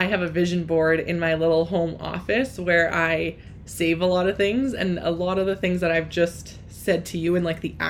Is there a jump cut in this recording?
no; 0 cuts

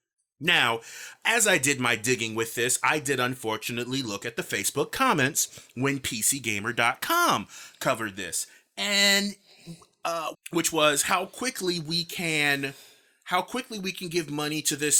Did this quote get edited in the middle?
yes; 1 cut; at 10.3 s

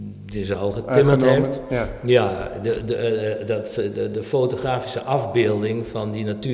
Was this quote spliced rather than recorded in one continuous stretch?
yes; 1 cut; at 3.9 s

